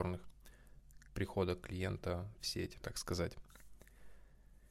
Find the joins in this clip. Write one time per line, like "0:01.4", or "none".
0:01.1
0:02.8